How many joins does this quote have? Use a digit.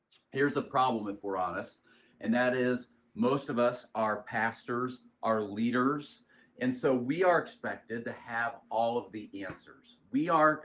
0